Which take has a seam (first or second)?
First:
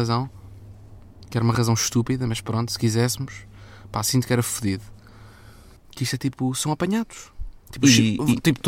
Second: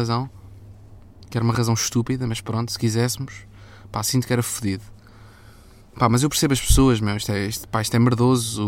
first